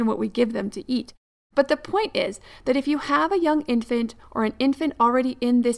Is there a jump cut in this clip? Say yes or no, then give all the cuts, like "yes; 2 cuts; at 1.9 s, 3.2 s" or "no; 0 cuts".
no; 0 cuts